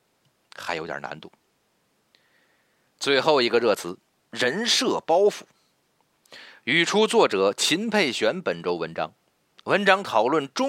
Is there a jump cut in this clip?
no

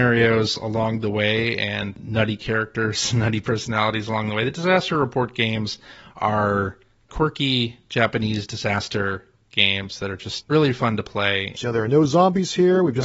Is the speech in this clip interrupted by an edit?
yes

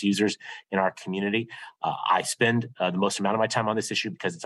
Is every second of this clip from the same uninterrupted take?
yes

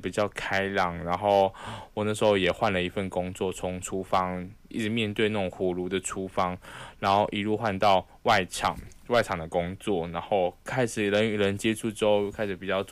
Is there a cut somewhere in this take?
yes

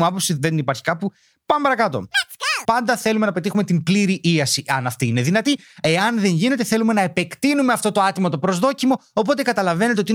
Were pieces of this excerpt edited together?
yes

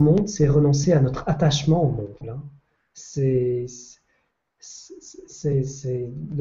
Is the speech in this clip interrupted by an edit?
yes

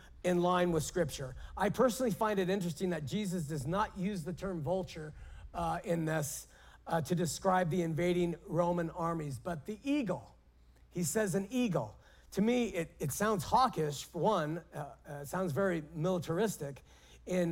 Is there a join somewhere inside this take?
no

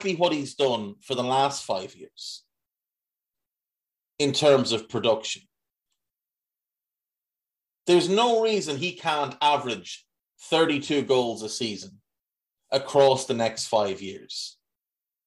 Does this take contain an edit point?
no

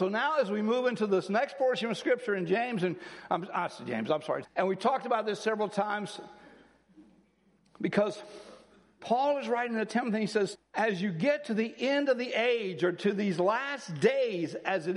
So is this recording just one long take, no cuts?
no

